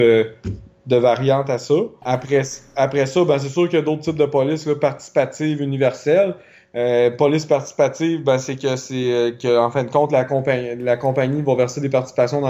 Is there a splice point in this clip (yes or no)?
no